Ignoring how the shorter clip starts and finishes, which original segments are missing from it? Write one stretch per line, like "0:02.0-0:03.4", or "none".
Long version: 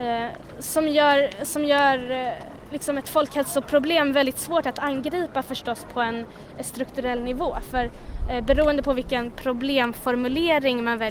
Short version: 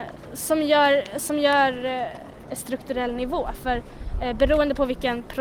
0:02.7-0:06.5

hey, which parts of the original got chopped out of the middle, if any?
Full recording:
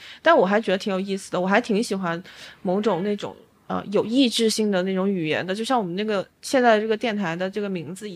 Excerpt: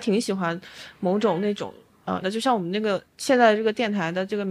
0:03.8-0:05.5

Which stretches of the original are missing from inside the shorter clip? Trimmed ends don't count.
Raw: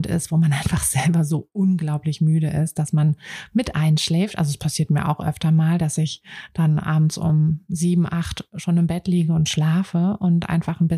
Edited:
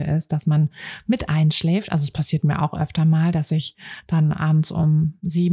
none

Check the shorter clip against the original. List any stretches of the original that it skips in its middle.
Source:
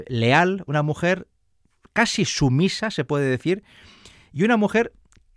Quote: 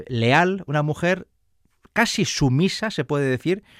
none

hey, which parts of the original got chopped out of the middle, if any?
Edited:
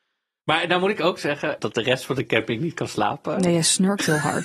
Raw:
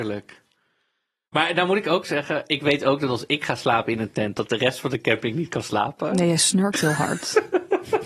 0:02.5-0:04.3

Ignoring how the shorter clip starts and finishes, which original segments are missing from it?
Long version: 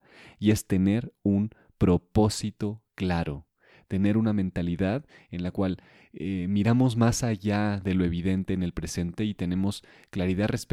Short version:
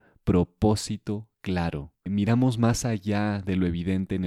0:03.6-0:06.4

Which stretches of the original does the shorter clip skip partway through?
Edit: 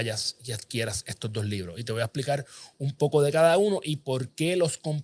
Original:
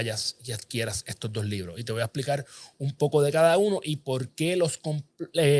none

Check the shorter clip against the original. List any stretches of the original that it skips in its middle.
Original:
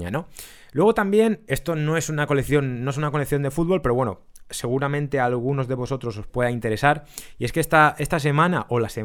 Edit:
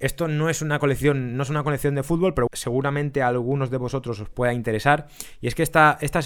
0:03.9-0:04.4

